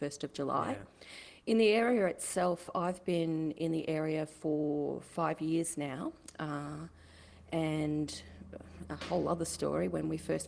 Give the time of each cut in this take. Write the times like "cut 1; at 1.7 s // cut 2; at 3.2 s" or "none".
none

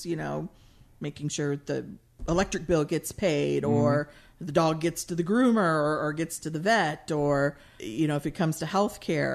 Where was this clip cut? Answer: cut 1; at 7.8 s

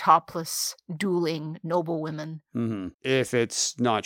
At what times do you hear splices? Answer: cut 1; at 2.9 s

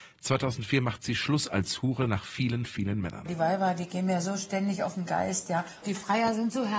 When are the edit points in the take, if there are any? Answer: cut 1; at 5.8 s

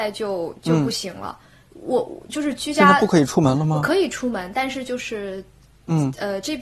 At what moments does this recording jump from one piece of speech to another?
none

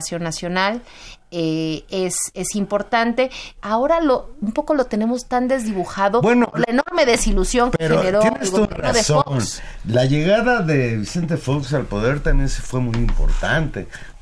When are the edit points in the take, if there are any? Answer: cut 1; at 3.6 s

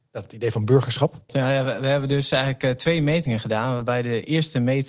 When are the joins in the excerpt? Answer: cut 1; at 1.3 s

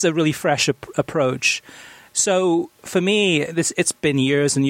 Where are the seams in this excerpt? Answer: none

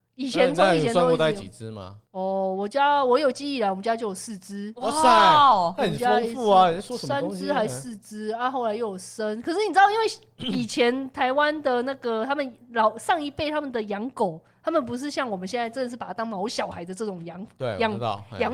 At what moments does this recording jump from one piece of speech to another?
cut 1; at 2.1 s

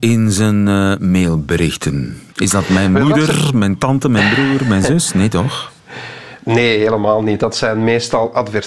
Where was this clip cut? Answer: none

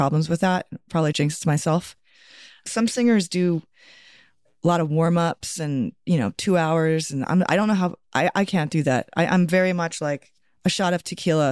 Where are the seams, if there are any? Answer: cut 1; at 1.1 s

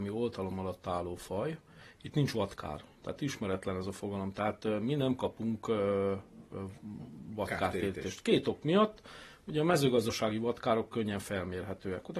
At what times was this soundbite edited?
none

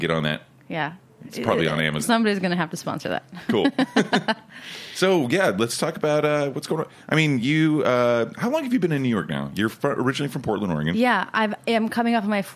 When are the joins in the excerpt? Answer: cut 1; at 2.0 s

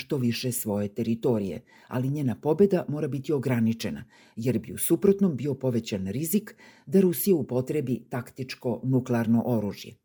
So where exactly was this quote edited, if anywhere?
none

